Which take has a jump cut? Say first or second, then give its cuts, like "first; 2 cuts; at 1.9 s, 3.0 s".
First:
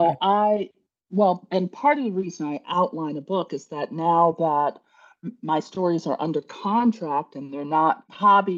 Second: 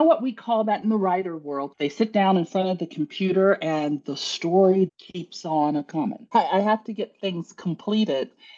second; 3 cuts; at 1.7 s, 4.9 s, 6.3 s